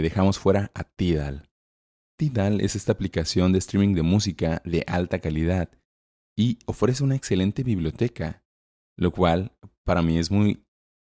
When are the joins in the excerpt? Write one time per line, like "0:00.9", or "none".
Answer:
0:08.8